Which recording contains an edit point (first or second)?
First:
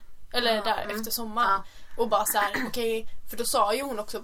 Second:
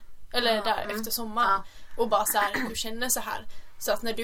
second